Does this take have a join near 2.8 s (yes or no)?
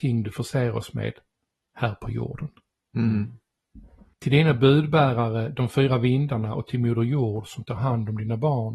no